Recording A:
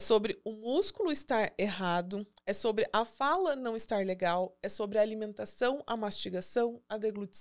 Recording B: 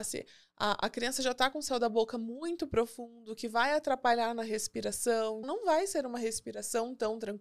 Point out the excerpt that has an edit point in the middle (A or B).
B